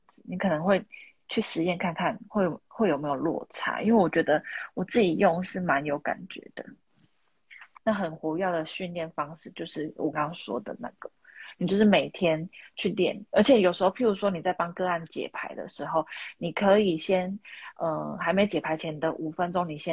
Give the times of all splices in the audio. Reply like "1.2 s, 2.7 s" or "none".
7.8 s, 10.1 s